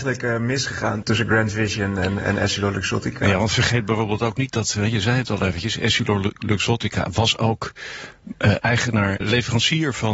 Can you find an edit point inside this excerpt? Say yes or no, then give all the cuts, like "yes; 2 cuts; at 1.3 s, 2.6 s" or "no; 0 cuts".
yes; 2 cuts; at 1.0 s, 9.2 s